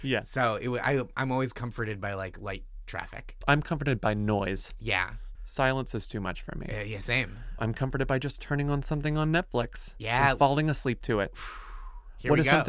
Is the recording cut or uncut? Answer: uncut